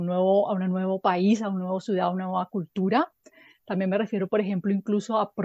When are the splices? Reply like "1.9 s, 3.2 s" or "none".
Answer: none